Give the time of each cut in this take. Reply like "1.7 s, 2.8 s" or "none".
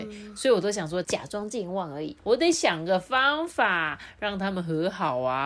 1.0 s, 2.2 s